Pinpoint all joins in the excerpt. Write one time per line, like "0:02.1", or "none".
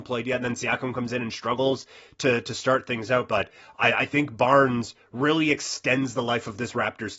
0:03.3